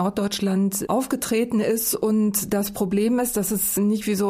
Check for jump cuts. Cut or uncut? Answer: uncut